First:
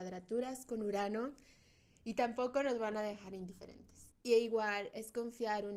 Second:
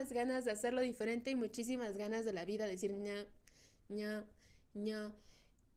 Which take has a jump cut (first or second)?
first